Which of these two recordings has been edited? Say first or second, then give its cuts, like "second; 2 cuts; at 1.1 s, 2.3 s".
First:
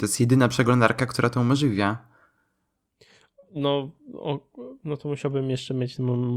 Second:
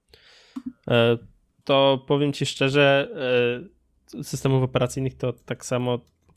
second; 1 cut; at 1.6 s